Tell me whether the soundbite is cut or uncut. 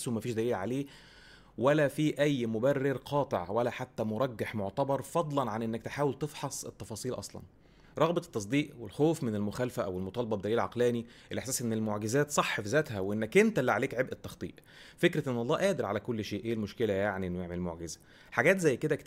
uncut